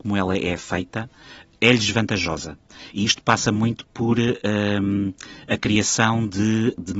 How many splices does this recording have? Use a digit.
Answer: 0